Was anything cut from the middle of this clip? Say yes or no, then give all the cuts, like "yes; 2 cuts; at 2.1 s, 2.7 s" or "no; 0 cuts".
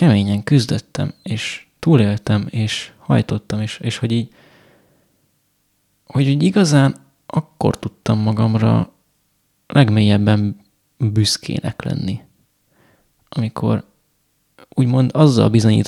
no; 0 cuts